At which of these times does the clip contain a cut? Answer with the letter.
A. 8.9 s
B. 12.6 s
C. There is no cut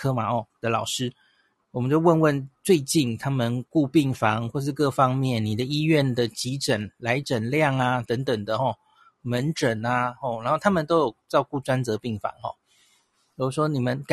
C